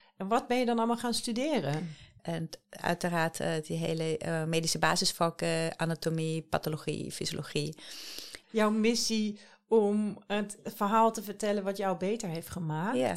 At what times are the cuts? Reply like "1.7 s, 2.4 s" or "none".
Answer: 2.2 s, 8.4 s